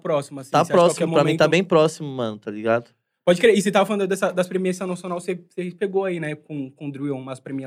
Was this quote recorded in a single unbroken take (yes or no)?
yes